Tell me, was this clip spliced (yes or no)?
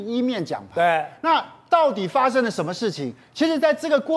no